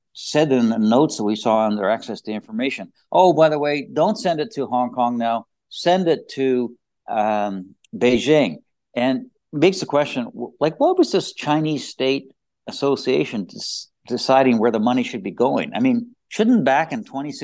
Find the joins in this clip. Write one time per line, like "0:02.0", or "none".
none